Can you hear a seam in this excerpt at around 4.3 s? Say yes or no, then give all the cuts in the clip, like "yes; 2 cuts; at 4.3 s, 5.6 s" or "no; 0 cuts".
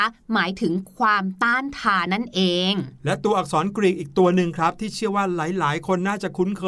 no; 1 cut; at 2.1 s